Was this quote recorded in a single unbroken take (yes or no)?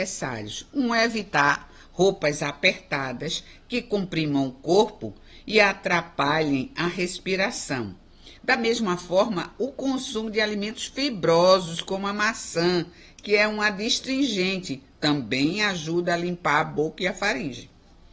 no